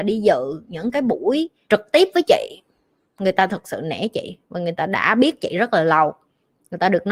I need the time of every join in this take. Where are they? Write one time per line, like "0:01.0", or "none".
0:01.7

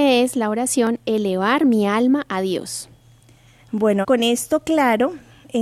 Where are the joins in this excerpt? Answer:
0:04.0

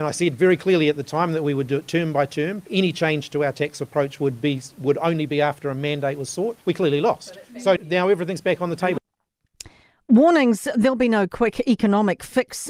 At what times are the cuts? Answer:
0:07.8

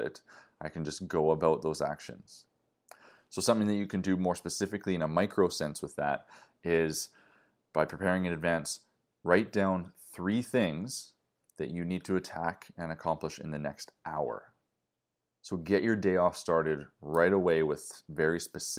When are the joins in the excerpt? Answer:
none

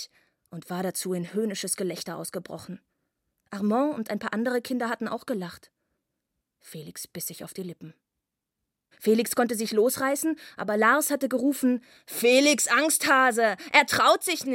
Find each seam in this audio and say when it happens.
0:08.9

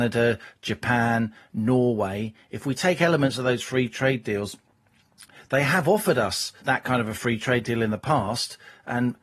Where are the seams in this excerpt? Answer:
0:06.6

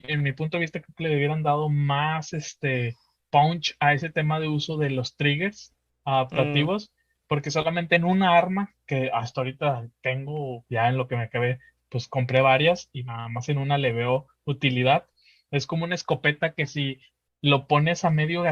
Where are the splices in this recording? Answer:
none

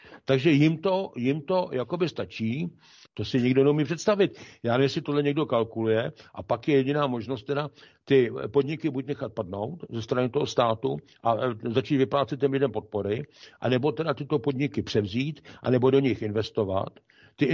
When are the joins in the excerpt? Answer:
0:03.0

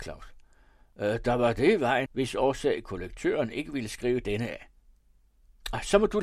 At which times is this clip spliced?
0:02.1

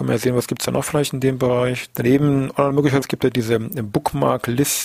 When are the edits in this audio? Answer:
0:01.9
0:03.0

